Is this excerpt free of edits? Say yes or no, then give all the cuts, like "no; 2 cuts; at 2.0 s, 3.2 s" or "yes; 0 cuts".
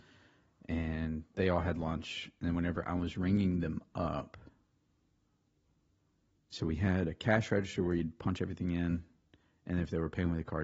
yes; 0 cuts